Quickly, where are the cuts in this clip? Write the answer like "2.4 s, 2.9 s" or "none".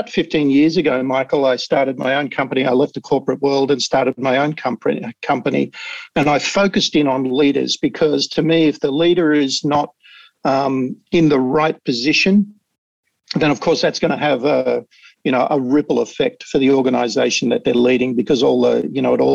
none